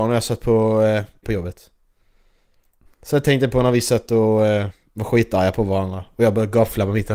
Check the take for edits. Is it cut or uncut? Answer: cut